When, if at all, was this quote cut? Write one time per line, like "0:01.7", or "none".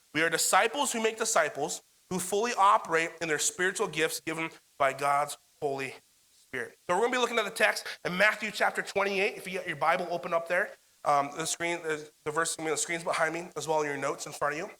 none